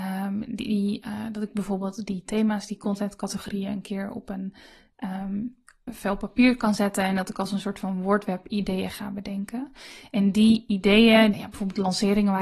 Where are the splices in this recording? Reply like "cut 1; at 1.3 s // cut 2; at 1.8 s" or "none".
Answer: cut 1; at 5.9 s // cut 2; at 11.3 s